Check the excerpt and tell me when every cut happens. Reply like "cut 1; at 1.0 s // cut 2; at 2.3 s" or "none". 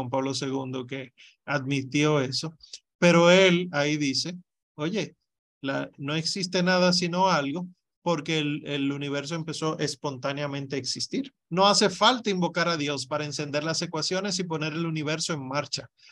cut 1; at 11.5 s